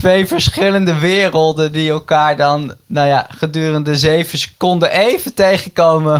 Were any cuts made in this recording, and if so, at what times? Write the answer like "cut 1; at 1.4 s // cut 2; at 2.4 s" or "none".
none